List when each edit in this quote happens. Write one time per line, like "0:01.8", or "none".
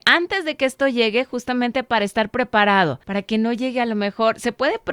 none